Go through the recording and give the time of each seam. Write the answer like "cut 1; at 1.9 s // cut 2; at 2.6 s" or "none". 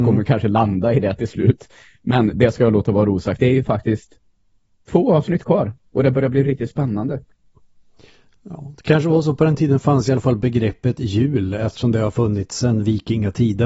cut 1; at 6.4 s